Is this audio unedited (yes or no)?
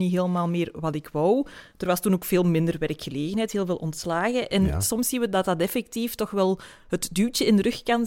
yes